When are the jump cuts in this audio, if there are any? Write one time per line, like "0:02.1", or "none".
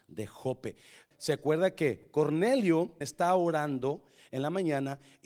0:01.1
0:03.0